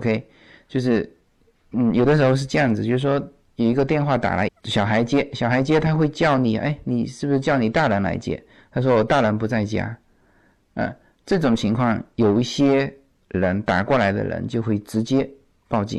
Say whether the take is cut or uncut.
cut